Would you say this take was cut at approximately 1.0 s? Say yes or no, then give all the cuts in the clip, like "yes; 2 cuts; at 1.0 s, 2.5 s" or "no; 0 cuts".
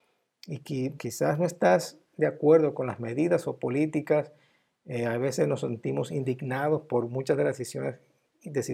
yes; 1 cut; at 1.0 s